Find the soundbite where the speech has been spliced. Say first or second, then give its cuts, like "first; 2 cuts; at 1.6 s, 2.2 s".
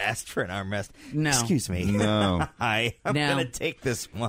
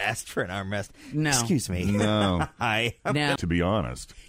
second; 1 cut; at 3.4 s